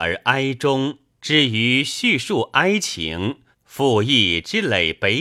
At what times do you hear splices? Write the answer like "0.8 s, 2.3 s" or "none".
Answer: 1.2 s, 3.5 s